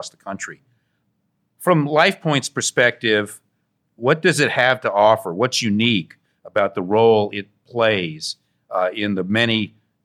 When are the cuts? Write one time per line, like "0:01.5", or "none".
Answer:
none